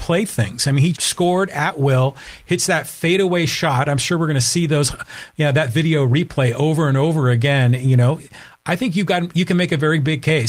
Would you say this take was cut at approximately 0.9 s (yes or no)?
yes